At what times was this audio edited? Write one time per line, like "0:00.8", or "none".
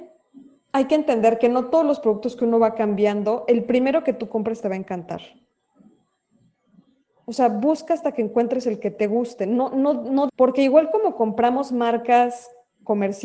0:10.3